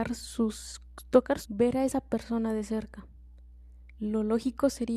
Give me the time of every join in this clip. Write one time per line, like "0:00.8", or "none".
0:01.4
0:04.0